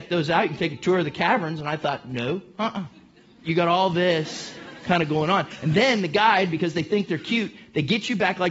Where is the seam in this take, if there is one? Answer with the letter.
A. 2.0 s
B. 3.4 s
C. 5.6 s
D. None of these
B